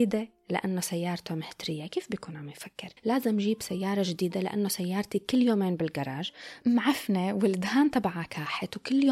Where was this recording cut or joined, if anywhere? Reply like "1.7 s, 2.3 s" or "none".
3.0 s

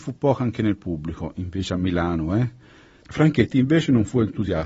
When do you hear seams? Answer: 3.0 s

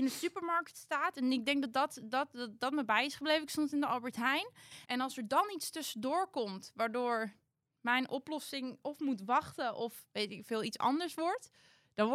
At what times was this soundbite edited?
4.8 s

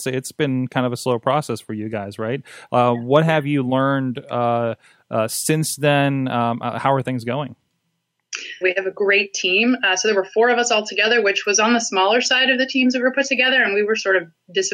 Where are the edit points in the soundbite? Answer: 8.6 s

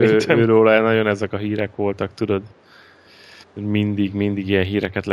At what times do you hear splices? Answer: 3.4 s

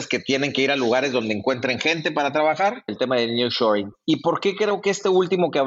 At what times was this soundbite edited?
2.9 s

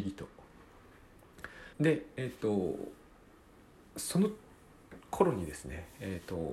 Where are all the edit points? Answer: 1.7 s

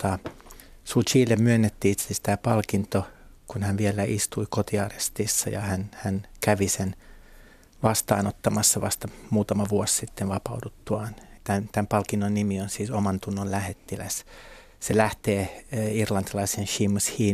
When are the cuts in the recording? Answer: 11.4 s

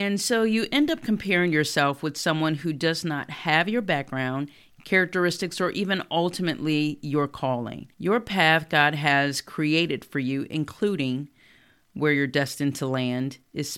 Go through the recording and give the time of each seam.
7.9 s

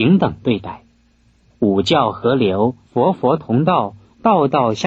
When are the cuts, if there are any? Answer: 1.5 s, 2.8 s

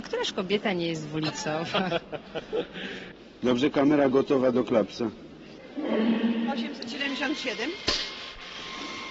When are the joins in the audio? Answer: none

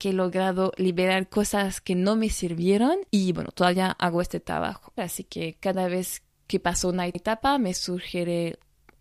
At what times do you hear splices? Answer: 5.0 s

